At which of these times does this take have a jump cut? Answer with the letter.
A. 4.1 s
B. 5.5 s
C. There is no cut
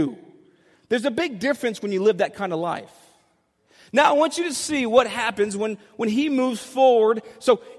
C